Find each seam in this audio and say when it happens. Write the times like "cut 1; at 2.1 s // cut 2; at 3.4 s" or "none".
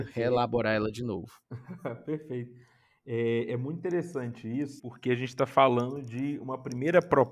cut 1; at 4.8 s